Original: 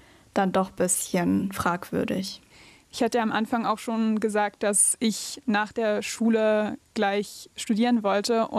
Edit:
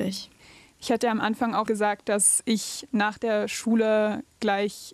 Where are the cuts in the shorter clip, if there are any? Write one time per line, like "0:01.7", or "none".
0:01.7